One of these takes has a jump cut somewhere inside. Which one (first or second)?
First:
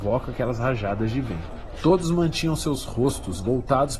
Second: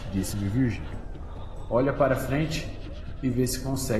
first